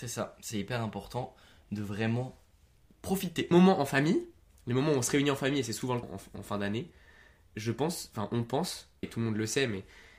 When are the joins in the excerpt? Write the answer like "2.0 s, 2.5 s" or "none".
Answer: 3.5 s, 6.0 s, 9.0 s